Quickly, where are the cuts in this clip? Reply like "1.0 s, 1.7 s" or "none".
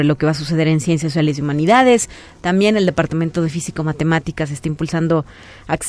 none